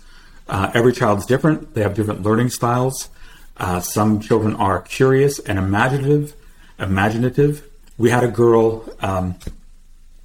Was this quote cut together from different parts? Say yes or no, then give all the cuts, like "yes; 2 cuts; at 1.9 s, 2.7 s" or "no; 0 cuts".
no; 0 cuts